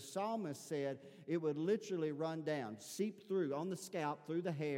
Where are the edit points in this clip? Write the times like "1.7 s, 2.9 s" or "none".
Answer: none